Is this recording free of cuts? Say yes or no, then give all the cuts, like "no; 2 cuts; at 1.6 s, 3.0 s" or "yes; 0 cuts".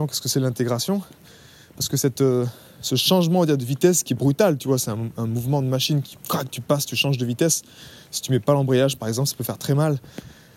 yes; 0 cuts